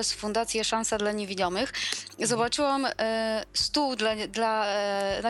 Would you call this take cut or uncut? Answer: uncut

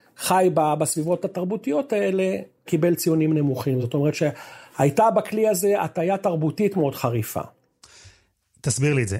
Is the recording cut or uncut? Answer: uncut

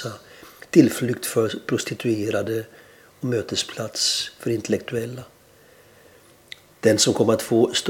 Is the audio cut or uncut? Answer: cut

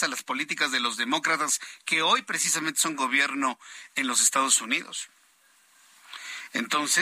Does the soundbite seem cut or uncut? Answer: uncut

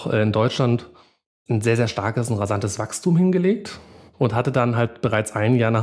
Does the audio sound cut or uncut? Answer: uncut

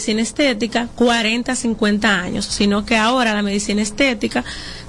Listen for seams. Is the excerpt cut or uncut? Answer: uncut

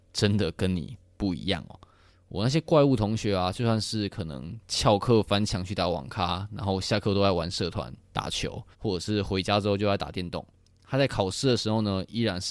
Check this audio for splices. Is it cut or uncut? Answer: cut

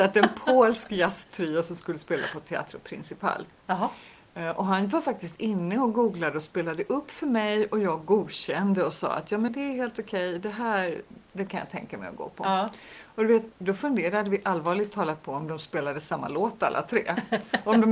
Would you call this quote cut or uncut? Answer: cut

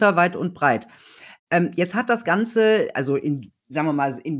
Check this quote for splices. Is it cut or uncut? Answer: cut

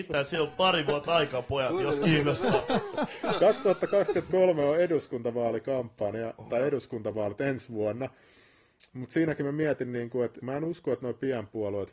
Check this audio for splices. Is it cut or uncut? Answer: cut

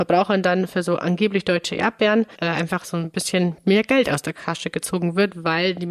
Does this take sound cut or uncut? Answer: cut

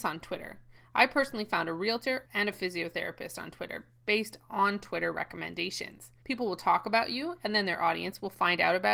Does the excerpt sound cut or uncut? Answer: cut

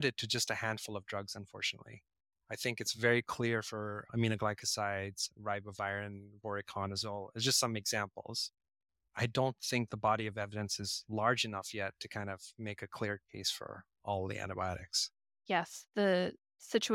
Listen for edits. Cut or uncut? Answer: uncut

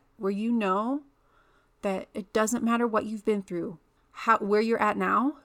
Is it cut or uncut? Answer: cut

